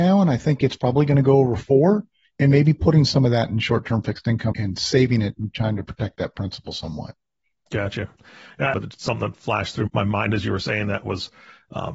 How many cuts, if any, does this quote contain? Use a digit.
3